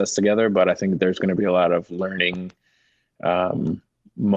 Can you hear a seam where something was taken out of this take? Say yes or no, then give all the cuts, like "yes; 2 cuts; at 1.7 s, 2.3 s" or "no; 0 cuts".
no; 0 cuts